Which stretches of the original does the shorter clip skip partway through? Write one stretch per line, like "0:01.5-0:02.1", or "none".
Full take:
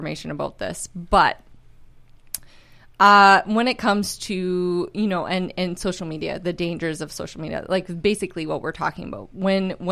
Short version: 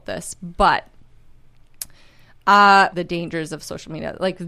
0:03.4-0:06.4